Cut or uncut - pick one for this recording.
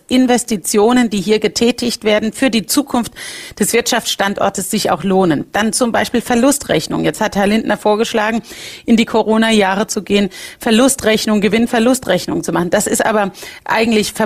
uncut